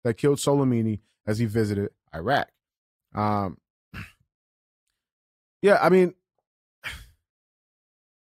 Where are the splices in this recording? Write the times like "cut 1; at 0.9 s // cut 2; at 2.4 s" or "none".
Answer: none